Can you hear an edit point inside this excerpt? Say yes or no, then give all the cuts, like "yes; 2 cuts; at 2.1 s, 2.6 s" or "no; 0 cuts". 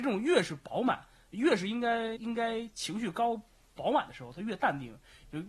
yes; 1 cut; at 2.2 s